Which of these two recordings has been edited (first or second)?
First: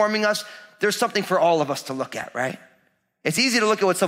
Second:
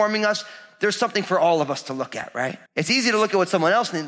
second